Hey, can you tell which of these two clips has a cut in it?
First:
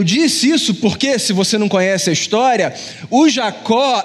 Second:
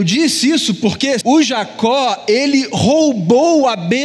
second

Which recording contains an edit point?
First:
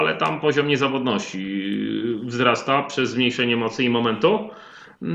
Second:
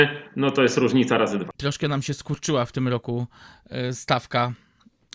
second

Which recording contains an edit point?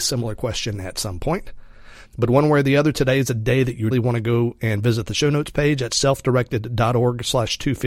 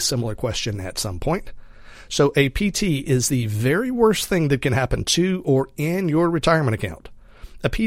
first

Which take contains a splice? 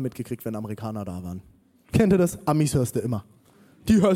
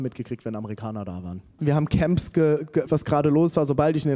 second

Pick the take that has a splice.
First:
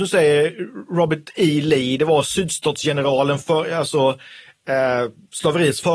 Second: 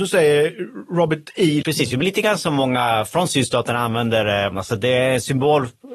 second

